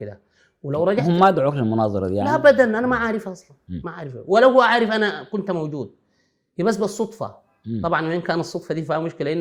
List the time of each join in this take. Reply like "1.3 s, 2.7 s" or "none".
none